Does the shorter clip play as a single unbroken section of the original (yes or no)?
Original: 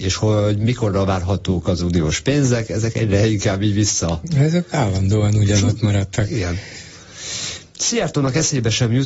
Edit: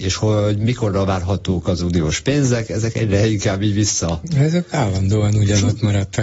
yes